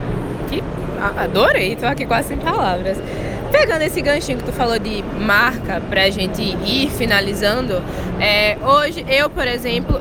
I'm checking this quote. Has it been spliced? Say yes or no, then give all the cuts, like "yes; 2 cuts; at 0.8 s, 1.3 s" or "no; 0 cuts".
no; 0 cuts